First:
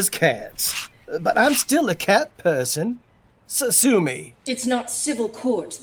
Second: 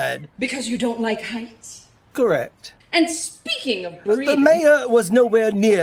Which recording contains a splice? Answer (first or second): second